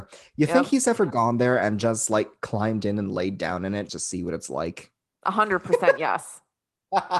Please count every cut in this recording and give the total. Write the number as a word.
two